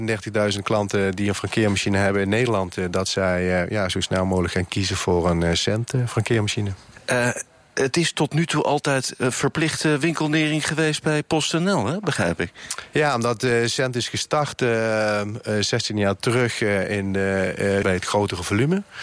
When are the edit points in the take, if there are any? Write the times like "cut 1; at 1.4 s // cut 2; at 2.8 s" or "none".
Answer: cut 1; at 17.8 s

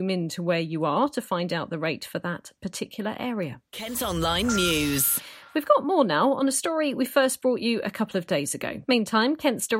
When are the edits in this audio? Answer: cut 1; at 8.8 s

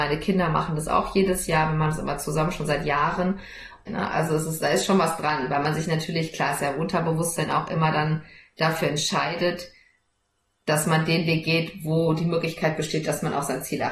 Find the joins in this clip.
cut 1; at 3.9 s

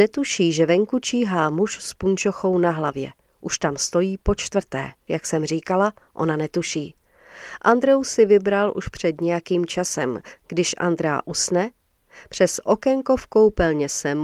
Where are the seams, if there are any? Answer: cut 1; at 5.1 s

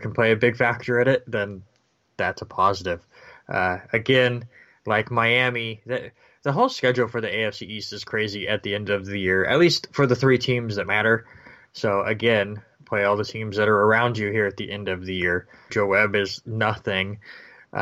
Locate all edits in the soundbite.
cut 1; at 11.7 s // cut 2; at 15.7 s

